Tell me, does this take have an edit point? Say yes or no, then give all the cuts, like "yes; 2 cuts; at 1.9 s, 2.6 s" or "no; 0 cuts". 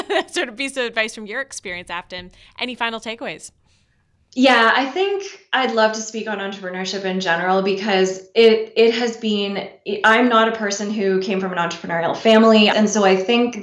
yes; 1 cut; at 12.7 s